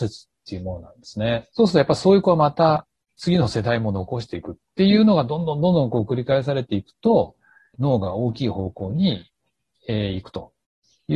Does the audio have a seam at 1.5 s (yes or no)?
yes